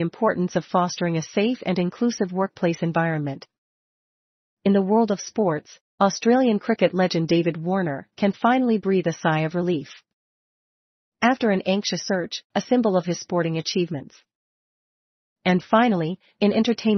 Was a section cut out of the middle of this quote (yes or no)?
yes